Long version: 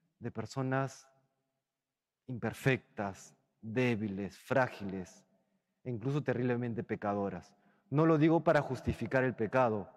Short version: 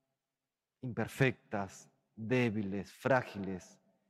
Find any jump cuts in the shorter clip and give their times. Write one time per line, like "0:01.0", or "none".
none